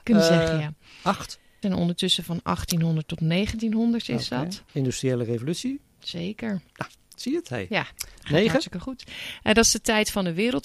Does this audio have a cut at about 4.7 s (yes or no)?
yes